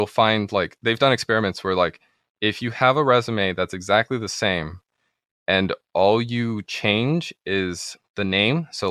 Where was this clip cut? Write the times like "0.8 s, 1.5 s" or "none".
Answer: none